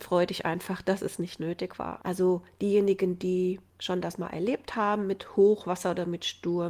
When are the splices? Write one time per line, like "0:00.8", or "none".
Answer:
0:02.0
0:03.7